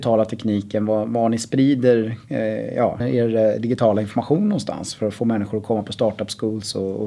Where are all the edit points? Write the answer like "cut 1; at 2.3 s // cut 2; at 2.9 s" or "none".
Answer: cut 1; at 3.0 s